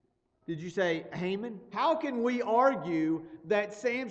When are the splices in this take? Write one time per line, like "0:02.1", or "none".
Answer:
0:01.7